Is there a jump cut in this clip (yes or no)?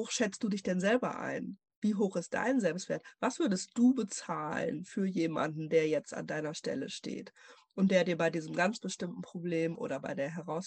no